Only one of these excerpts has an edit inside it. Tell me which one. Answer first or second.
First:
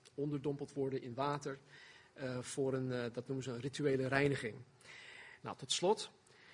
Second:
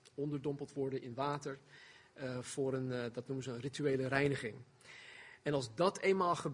first